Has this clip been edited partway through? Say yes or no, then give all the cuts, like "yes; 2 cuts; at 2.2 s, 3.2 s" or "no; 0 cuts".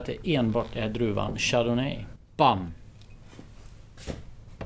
yes; 1 cut; at 2.2 s